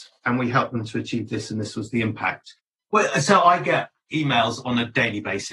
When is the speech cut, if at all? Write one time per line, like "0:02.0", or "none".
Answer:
0:02.8

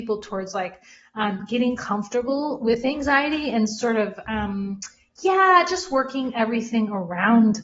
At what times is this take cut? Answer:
none

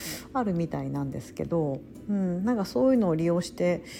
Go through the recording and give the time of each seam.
none

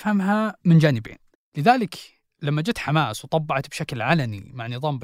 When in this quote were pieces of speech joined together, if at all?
0:01.3

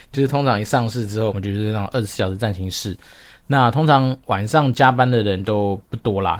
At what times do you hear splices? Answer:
0:01.3

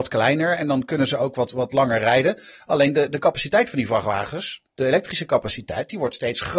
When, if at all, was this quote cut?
none

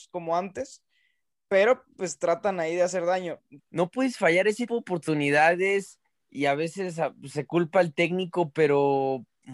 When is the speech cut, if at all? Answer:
0:03.6
0:04.7

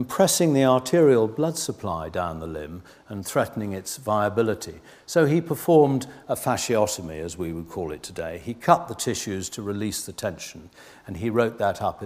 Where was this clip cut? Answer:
none

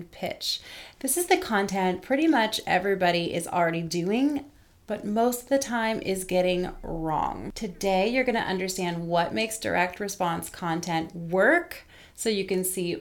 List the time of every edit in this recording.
0:00.9

